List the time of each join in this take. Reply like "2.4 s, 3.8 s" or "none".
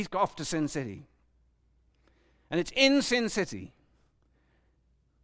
none